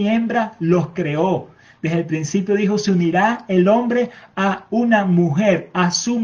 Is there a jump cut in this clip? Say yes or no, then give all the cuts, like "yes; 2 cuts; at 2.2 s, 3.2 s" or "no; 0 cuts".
no; 0 cuts